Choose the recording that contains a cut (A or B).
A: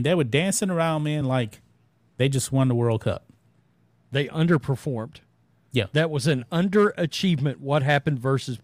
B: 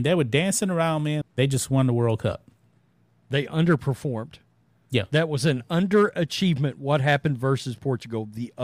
B